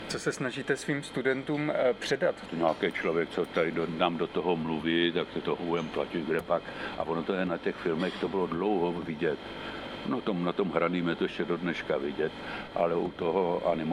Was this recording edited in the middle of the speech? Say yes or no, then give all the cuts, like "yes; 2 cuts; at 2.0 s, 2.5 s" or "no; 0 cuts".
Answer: yes; 1 cut; at 2.5 s